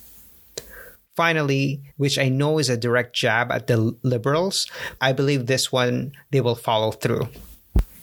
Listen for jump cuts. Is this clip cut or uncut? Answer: cut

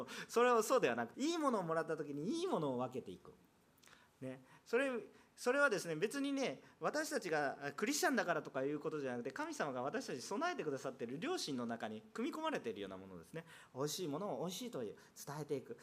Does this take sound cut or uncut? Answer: cut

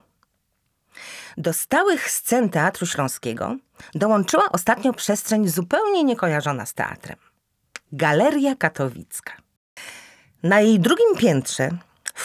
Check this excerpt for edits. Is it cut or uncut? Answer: uncut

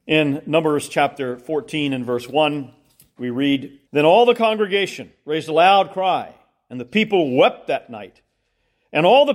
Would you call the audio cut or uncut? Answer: cut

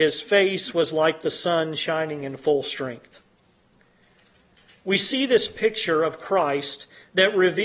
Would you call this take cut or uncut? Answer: uncut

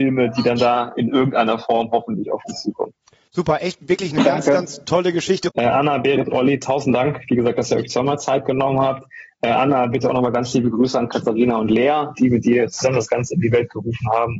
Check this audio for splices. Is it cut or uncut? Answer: cut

